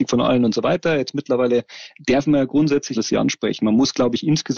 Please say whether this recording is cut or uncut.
cut